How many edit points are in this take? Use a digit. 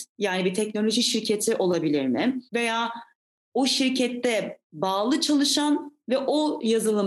2